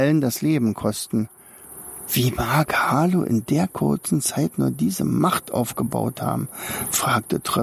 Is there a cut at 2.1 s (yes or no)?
yes